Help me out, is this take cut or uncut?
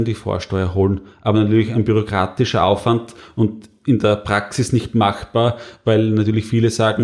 uncut